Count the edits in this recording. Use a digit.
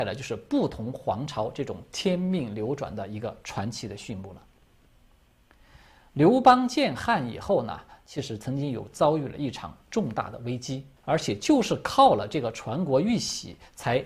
2